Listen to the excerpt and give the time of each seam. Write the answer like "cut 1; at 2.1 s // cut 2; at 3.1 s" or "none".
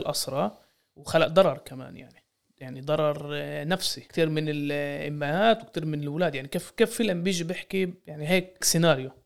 cut 1; at 4.1 s